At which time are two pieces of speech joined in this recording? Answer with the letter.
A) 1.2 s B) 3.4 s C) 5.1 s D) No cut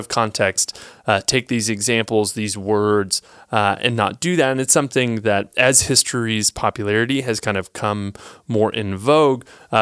D